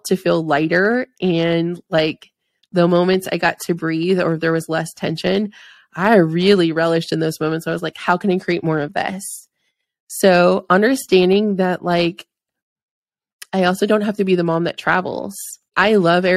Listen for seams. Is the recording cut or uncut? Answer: uncut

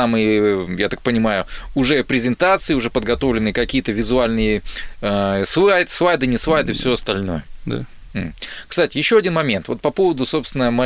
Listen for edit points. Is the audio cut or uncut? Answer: uncut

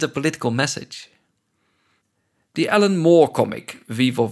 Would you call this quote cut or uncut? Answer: uncut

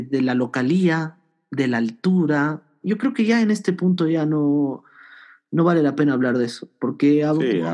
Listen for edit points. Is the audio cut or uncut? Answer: cut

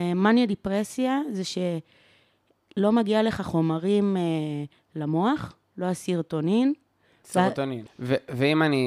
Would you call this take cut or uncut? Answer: cut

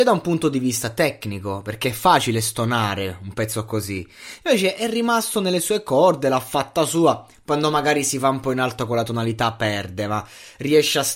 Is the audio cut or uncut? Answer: uncut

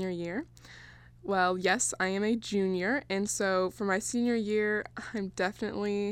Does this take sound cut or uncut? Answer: uncut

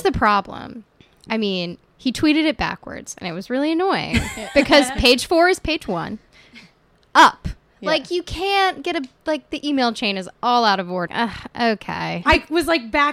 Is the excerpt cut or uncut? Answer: cut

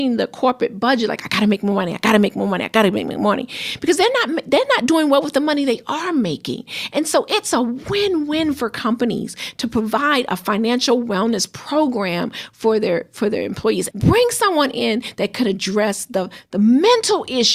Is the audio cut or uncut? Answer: cut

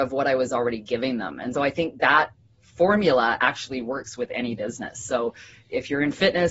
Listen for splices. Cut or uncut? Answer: cut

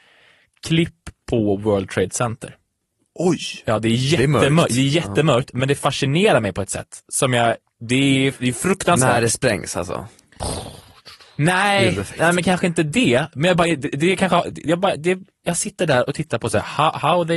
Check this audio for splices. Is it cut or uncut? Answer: uncut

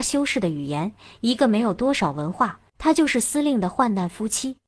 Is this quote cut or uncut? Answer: cut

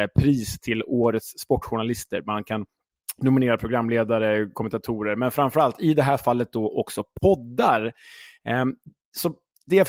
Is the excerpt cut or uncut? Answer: uncut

